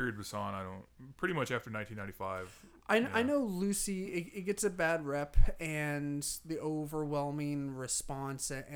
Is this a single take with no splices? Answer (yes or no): yes